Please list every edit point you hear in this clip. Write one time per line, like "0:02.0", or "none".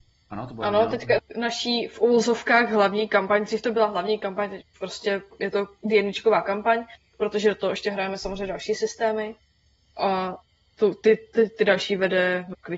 0:01.2